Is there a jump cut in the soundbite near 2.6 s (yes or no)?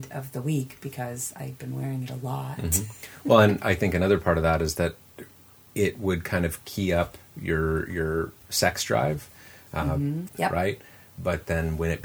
no